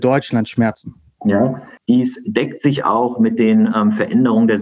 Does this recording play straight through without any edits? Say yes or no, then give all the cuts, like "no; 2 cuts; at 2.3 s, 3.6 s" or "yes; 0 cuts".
no; 1 cut; at 1.8 s